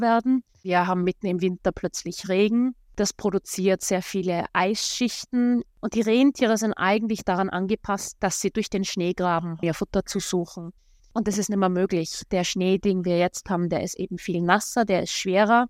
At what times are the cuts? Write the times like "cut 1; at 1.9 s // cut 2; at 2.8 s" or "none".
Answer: cut 1; at 9.6 s // cut 2; at 11.0 s